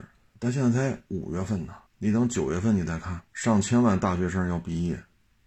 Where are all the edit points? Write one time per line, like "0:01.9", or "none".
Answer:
0:01.9
0:03.3